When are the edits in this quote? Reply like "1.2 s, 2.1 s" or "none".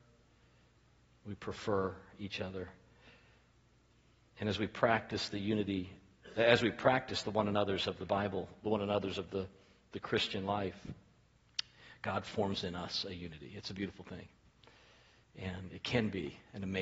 none